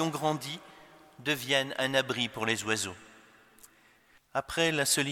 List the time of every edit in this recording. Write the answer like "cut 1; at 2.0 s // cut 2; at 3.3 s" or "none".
cut 1; at 4.2 s